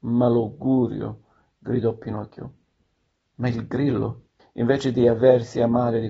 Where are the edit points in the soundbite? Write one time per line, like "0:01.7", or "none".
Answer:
0:04.4